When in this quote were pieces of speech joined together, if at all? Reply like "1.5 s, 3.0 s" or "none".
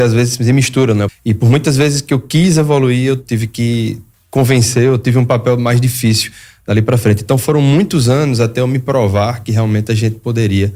1.1 s

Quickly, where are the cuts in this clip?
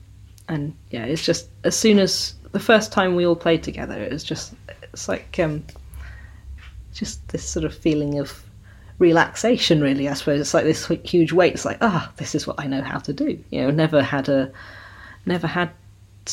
none

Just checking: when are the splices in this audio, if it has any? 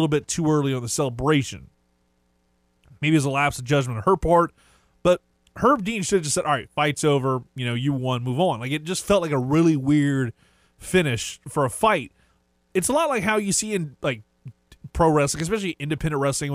none

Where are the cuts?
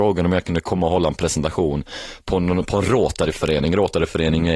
none

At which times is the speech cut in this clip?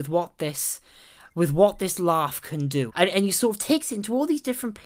2.9 s

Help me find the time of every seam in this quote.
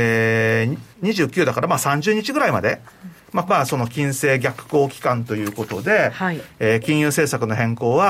0.9 s, 3.5 s

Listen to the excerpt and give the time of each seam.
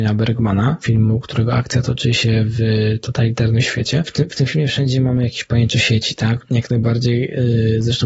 6.4 s

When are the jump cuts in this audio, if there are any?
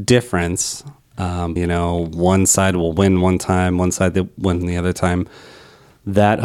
1.6 s

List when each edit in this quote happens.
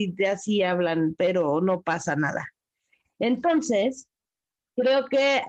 none

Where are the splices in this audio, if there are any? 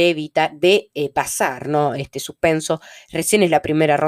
none

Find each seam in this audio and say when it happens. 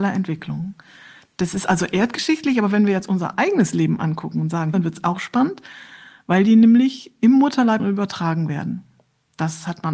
4.7 s, 7.8 s

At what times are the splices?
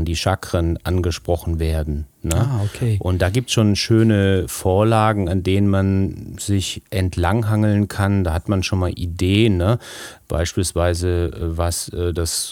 none

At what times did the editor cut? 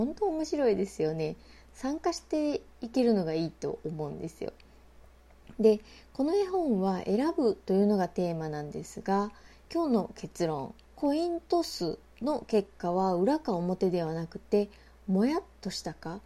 9.7 s, 10.8 s

